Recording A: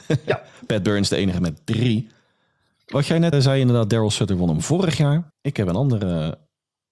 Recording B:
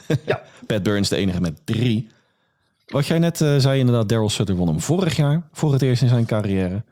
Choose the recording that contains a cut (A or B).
A